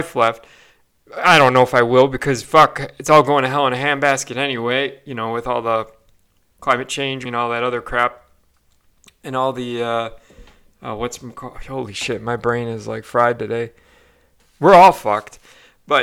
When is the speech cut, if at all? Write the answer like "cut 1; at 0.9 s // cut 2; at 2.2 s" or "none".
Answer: cut 1; at 7.3 s // cut 2; at 14.4 s